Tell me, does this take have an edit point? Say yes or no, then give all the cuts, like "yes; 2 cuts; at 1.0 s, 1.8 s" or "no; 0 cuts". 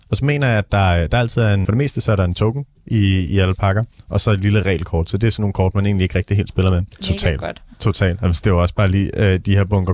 yes; 2 cuts; at 1.6 s, 7.0 s